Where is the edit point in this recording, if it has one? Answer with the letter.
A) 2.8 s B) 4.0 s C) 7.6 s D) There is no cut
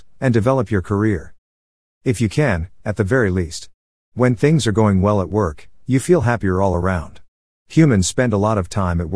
A